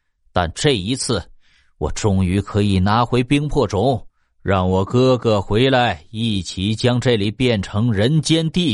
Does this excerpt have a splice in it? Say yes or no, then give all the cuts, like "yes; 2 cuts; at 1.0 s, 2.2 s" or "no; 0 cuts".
no; 0 cuts